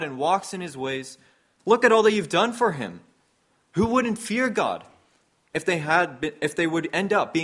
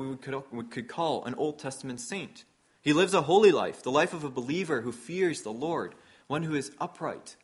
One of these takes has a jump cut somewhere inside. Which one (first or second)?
first